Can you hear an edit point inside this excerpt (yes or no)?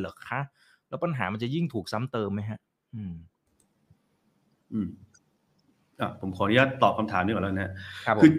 no